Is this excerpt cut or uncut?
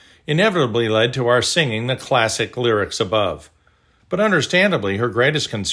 cut